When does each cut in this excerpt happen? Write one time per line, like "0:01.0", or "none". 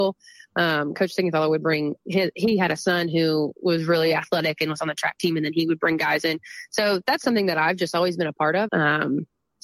0:08.7